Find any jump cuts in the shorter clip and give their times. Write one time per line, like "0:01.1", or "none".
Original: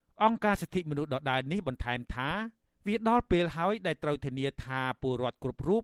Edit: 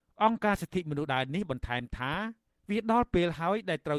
0:01.1